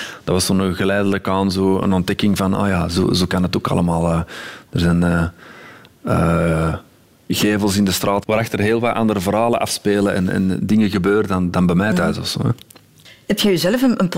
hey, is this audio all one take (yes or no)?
yes